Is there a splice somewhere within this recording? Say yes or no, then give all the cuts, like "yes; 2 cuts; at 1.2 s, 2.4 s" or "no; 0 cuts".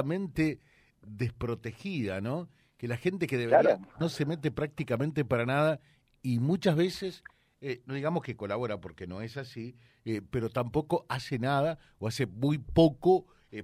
yes; 1 cut; at 4.0 s